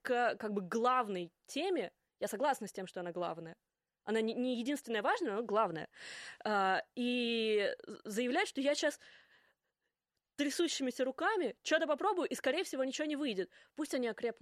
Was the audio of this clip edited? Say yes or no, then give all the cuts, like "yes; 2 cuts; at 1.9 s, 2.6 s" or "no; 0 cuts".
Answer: no; 0 cuts